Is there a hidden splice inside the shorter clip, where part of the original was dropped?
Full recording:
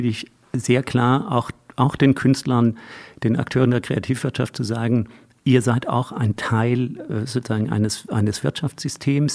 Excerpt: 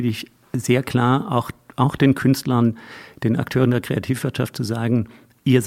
no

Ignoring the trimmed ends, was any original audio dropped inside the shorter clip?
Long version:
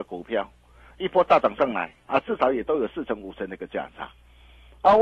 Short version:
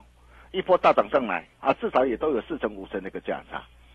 no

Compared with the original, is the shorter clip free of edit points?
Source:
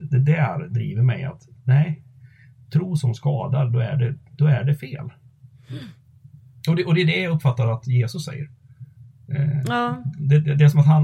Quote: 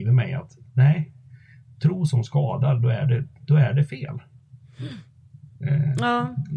no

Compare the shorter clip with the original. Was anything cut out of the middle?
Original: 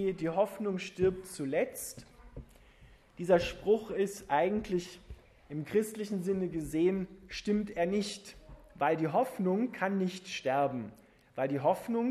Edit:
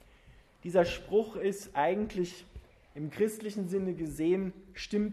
no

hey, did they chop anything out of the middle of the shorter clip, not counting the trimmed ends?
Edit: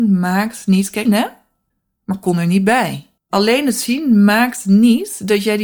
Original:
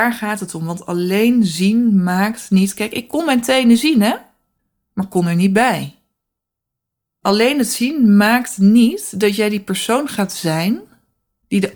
yes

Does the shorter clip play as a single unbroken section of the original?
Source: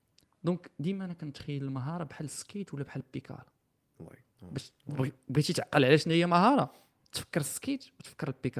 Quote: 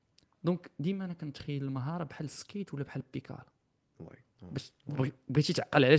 yes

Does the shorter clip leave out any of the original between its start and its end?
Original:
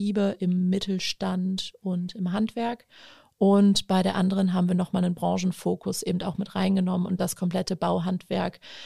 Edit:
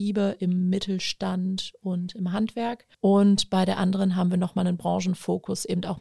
yes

